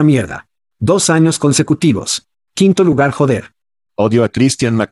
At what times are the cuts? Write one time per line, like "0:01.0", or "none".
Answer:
0:03.9